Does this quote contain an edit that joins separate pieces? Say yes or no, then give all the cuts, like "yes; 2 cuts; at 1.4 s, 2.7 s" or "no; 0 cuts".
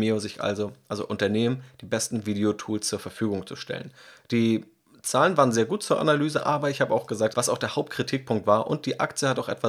yes; 1 cut; at 7.3 s